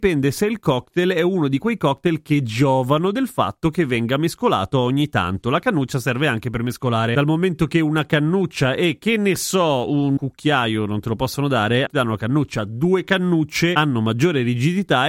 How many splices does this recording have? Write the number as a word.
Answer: one